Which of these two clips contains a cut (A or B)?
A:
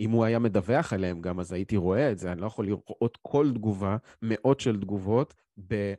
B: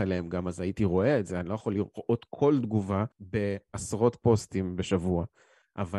B